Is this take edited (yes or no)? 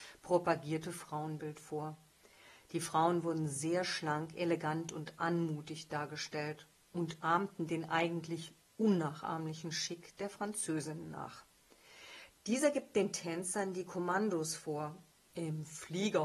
yes